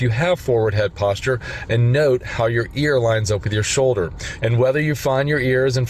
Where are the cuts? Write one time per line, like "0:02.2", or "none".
0:01.7
0:04.4